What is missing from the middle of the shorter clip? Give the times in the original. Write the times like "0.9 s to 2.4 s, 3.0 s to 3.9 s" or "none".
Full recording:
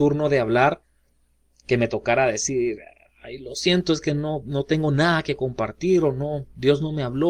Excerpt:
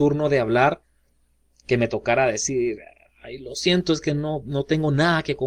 none